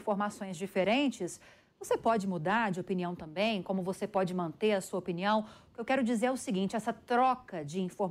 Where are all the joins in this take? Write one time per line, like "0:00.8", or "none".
none